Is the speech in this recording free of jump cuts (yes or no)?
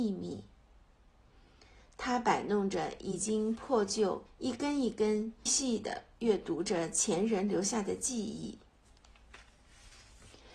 no